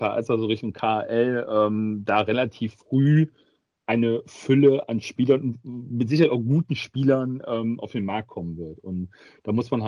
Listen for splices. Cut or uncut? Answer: uncut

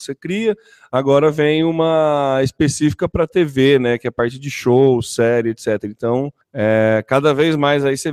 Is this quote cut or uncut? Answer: cut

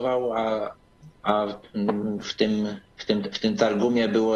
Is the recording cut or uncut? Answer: cut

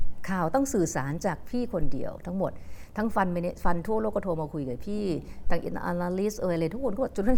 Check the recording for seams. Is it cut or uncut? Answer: uncut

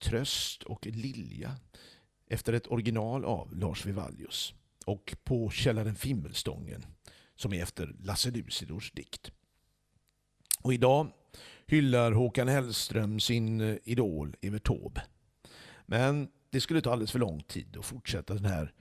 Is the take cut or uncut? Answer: uncut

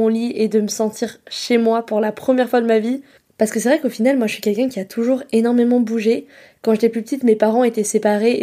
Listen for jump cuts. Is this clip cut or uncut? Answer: uncut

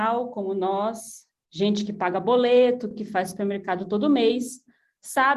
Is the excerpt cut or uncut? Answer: uncut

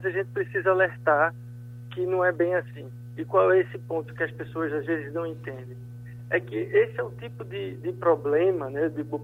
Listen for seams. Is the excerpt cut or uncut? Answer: uncut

